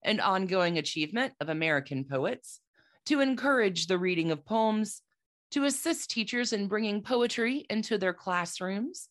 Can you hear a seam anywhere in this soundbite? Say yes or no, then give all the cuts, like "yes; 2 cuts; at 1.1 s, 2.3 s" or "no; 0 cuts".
no; 0 cuts